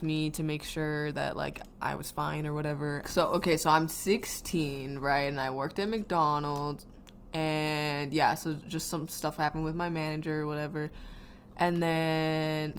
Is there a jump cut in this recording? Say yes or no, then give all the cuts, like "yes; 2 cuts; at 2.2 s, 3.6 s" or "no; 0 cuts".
yes; 1 cut; at 3.0 s